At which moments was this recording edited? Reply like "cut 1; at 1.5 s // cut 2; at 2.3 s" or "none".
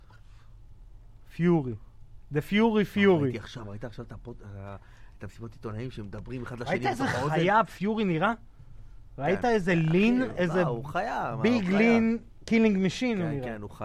none

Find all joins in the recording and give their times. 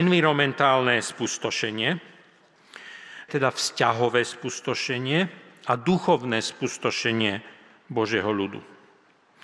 cut 1; at 3.3 s

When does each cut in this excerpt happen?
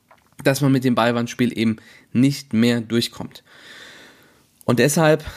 none

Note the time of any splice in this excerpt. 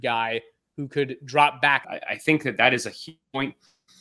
cut 1; at 1.8 s

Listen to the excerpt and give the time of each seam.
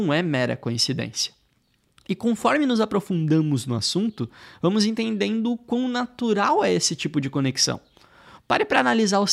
cut 1; at 8.4 s

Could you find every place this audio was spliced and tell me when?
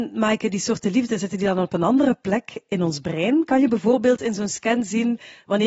none

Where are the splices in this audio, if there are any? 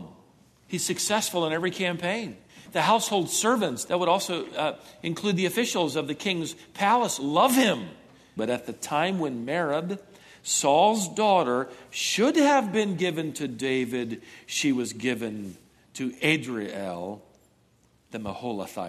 cut 1; at 8.4 s

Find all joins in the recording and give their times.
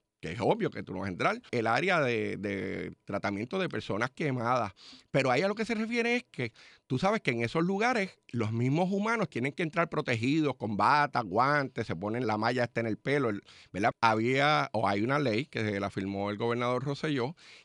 cut 1; at 1.5 s // cut 2; at 12.2 s // cut 3; at 13.9 s

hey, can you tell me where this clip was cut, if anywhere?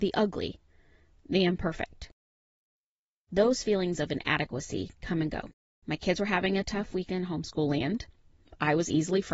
cut 1; at 5.8 s

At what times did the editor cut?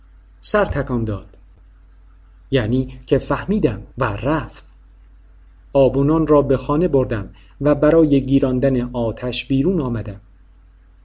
cut 1; at 3.9 s

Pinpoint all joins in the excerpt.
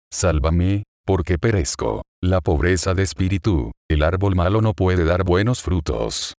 cut 1; at 3.8 s

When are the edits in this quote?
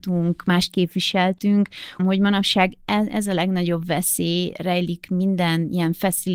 cut 1; at 2.0 s

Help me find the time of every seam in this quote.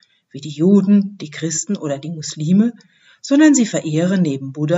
none

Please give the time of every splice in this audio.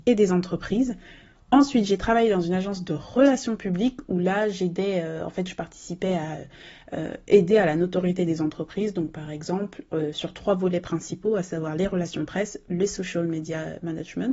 none

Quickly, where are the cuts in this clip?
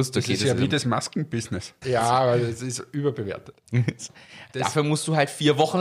cut 1; at 1.8 s // cut 2; at 4.5 s

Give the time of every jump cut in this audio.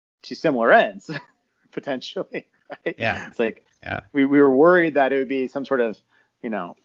cut 1; at 3.3 s

